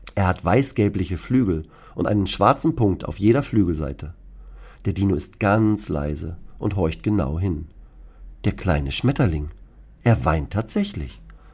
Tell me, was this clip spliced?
no; 0 cuts

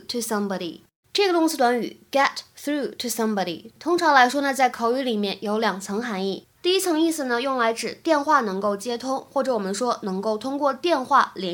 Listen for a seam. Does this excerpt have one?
no; 0 cuts

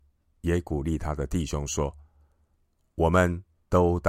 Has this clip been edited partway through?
no; 0 cuts

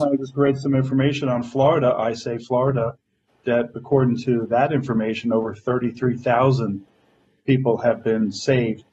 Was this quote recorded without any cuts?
yes; 0 cuts

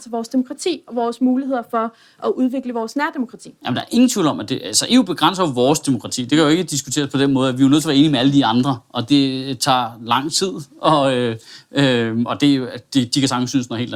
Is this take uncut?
yes; 0 cuts

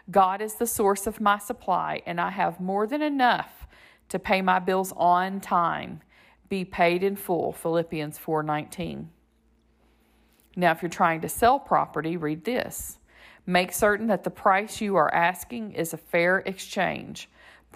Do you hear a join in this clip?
no; 0 cuts

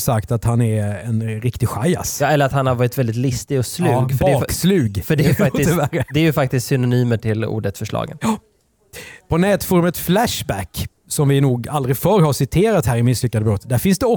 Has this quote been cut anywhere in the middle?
no; 0 cuts

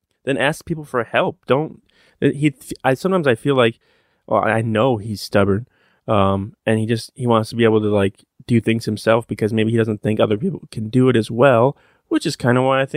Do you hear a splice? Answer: no; 0 cuts

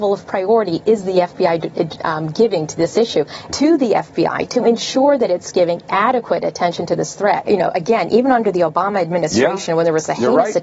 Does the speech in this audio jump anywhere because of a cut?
yes; 2 cuts; at 3.5 s, 7.4 s

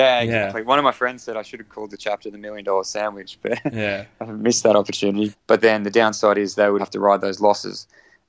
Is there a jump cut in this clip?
yes; 2 cuts; at 5.3 s, 6.8 s

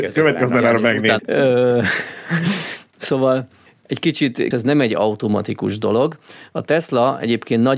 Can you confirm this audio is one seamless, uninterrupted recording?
no; 2 cuts; at 1.2 s, 4.5 s

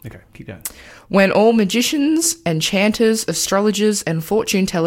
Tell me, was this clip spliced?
no; 0 cuts

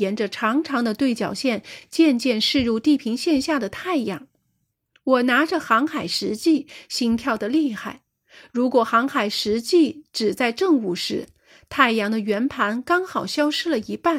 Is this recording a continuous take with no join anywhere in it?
yes; 0 cuts

